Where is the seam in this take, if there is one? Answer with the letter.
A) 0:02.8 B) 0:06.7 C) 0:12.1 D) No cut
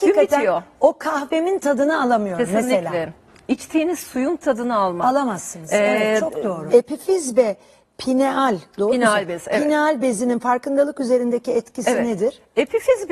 B